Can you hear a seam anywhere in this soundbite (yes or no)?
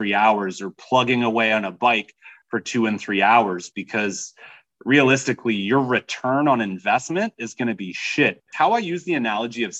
yes